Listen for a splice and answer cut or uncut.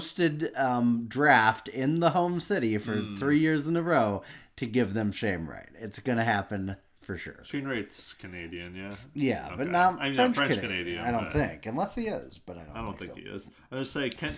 uncut